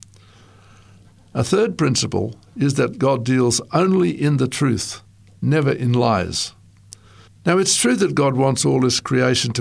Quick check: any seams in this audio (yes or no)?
yes